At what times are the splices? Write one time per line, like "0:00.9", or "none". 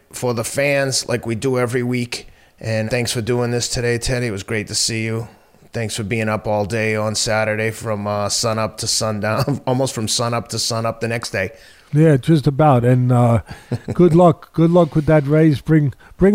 0:02.9